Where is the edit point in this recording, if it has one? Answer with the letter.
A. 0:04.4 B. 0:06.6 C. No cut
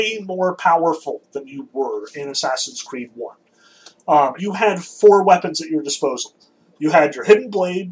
A